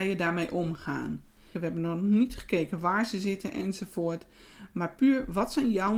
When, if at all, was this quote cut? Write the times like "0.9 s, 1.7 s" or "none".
1.5 s